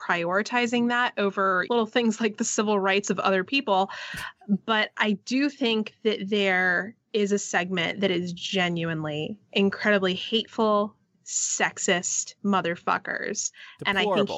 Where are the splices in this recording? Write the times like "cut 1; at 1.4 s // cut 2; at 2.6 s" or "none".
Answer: cut 1; at 1.7 s // cut 2; at 11.1 s // cut 3; at 12.4 s